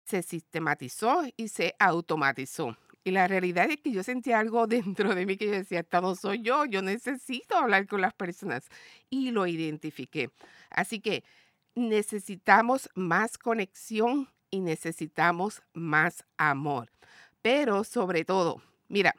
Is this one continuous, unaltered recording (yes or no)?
yes